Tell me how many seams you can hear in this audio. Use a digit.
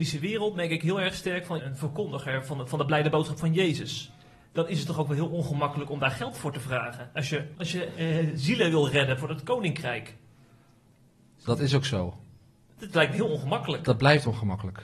2